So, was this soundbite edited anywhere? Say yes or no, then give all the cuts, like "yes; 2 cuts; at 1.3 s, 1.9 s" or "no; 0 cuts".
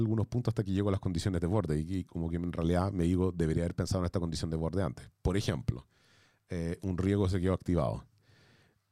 no; 0 cuts